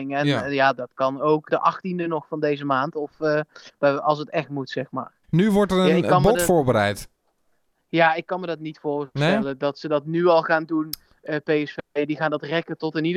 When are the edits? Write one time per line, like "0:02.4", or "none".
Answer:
0:01.5
0:03.8
0:05.2

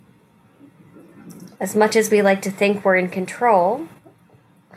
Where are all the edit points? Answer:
0:01.5

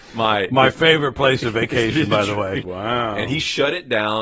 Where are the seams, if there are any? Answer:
0:02.6

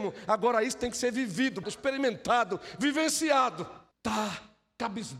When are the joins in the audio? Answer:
0:01.6
0:03.9

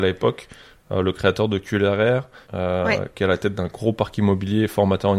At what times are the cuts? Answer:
0:02.5

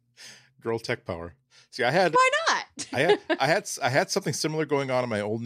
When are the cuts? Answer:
0:02.1

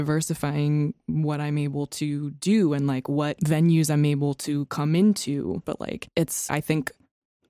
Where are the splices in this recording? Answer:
0:05.6

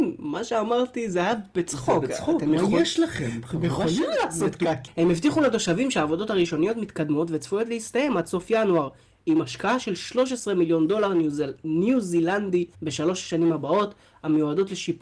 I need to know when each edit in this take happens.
0:04.9
0:12.7

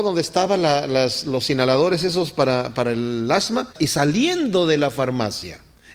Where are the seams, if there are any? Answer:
0:03.7

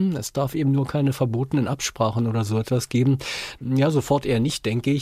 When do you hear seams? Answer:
0:03.6

